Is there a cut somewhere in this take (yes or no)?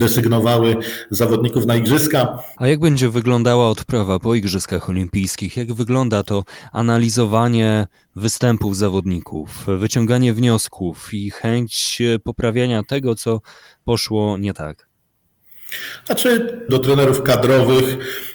yes